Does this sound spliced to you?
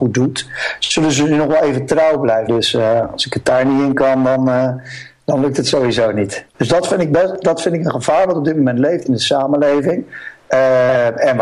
yes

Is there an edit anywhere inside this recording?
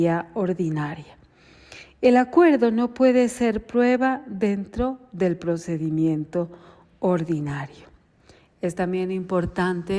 no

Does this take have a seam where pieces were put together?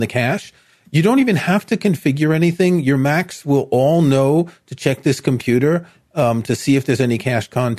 no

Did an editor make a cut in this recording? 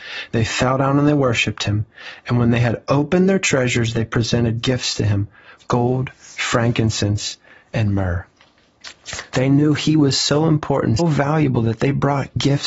yes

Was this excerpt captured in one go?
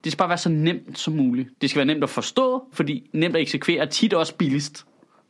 no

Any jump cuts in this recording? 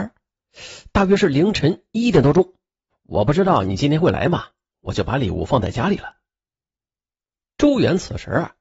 yes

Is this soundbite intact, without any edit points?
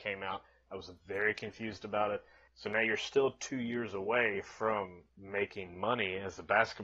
no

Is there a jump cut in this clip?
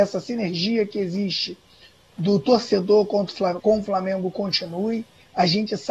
yes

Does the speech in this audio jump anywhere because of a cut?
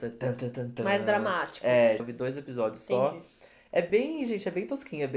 yes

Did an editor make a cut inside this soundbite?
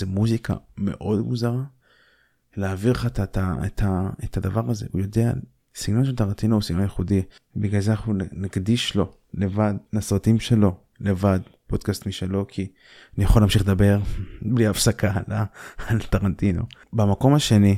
no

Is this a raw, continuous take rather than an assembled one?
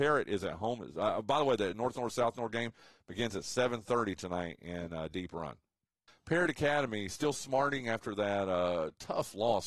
no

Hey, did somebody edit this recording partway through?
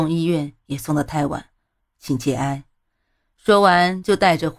yes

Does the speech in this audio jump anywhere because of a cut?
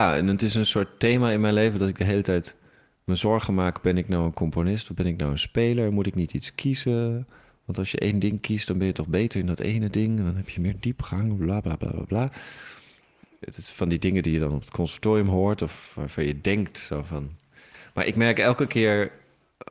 no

